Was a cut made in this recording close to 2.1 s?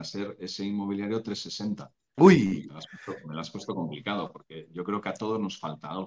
yes; 1 cut; at 2.1 s

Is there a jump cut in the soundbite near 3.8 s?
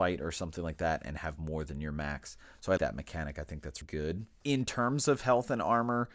yes; 2 cuts; at 2.8 s, 3.8 s

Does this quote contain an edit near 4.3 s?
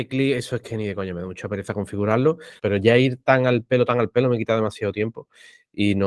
no; 1 cut; at 2.6 s

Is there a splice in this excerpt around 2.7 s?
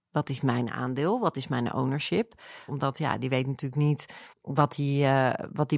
yes; 2 cuts; at 2.7 s, 4.3 s

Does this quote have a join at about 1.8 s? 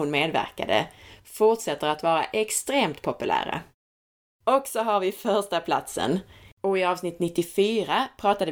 no; 2 cuts; at 4.4 s, 6.5 s

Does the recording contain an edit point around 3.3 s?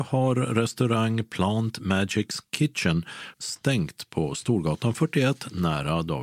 yes; 1 cut; at 3.3 s

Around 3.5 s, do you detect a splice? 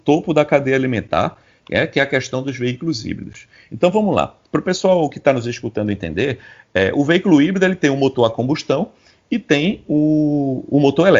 no; 0 cuts

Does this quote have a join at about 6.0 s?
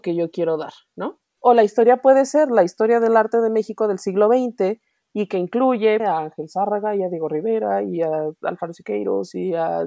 yes; 2 cuts; at 1.4 s, 6.0 s

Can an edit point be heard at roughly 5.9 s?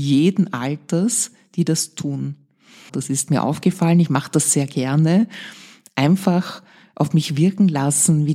no; 1 cut; at 2.9 s

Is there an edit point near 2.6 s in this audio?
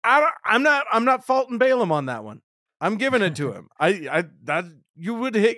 no; 0 cuts

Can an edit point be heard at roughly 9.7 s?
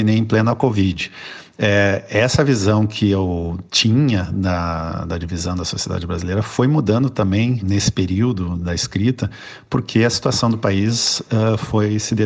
no; 2 cuts; at 3.7 s, 7.6 s

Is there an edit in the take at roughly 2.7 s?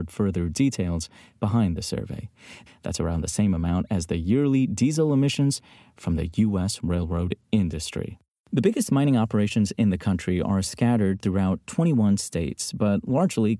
yes; 1 cut; at 2.7 s

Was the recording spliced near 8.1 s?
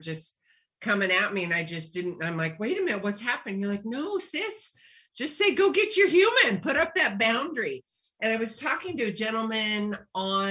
no; 0 cuts

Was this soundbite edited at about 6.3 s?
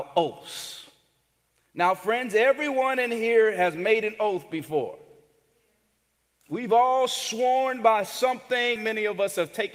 no; 1 cut; at 8.8 s

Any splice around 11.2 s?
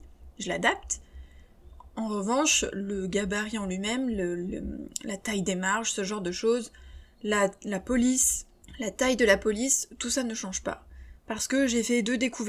yes; 1 cut; at 11.2 s

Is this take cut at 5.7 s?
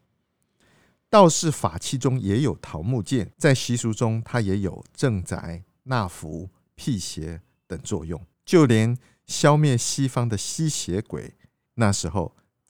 no; 3 cuts; at 3.3 s, 8.3 s, 11.7 s

